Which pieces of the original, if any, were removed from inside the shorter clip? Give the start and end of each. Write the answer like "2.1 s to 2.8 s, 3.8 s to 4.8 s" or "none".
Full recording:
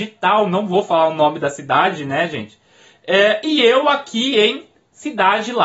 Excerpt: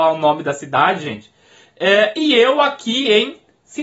2.0 s to 2.3 s